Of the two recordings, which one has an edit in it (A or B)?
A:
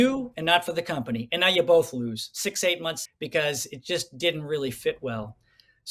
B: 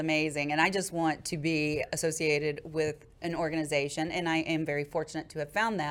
A